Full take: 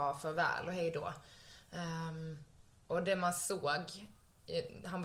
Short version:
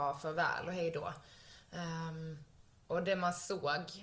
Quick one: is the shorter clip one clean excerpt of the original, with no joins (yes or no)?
yes